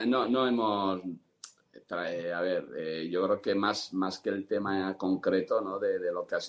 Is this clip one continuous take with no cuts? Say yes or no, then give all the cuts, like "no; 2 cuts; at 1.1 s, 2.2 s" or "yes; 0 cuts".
yes; 0 cuts